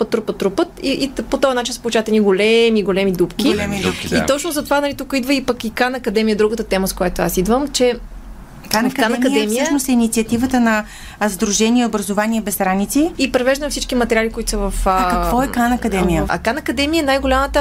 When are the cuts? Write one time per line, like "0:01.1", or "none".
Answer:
0:13.1
0:16.3